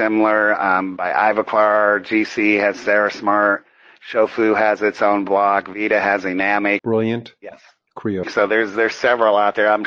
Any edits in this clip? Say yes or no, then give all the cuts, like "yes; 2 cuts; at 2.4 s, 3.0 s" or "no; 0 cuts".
yes; 2 cuts; at 6.8 s, 8.2 s